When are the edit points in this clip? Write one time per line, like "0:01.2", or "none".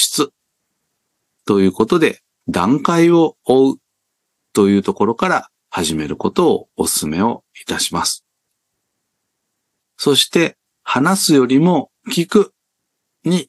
none